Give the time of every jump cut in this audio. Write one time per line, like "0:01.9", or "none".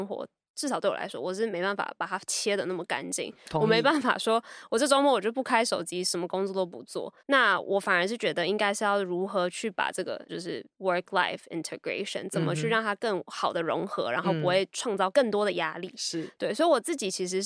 0:07.2
0:10.3

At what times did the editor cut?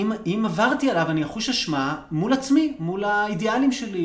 none

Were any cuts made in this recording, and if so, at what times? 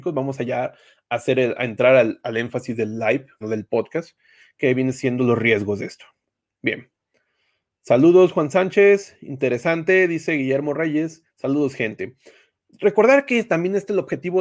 0:03.4

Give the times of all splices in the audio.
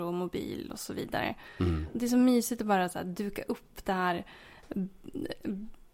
none

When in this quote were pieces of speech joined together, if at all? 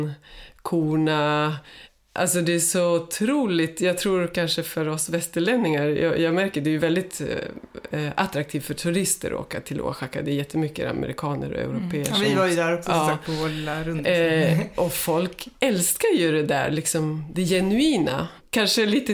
none

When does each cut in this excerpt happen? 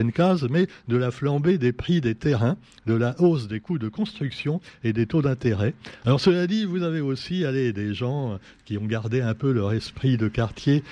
0:06.0

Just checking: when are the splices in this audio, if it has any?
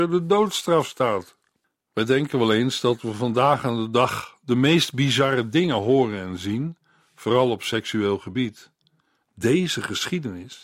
0:09.2

